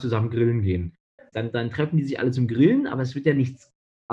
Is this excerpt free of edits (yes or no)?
no